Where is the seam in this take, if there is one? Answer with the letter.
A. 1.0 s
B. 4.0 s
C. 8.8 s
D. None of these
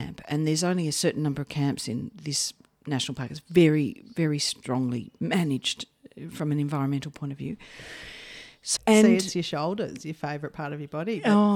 C